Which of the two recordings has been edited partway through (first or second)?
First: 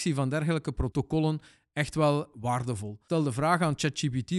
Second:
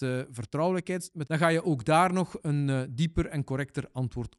second